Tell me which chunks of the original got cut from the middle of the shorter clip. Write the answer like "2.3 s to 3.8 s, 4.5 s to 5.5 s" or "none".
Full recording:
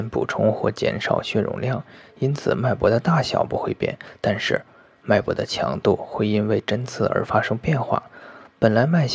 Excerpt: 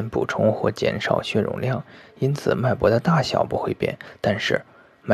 none